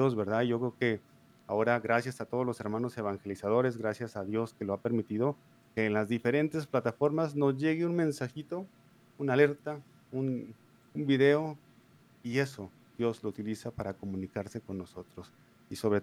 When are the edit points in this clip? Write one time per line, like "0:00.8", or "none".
none